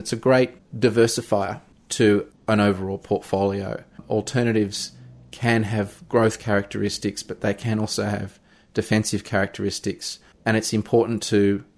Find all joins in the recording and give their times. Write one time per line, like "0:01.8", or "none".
none